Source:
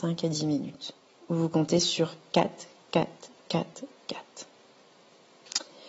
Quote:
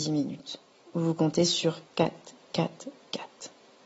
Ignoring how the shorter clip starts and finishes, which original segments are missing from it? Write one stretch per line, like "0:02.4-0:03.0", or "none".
0:02.2-0:02.8